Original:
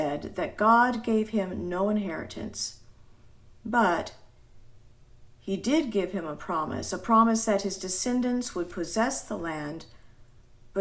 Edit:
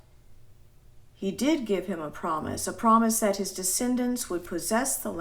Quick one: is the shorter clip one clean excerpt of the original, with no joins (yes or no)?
yes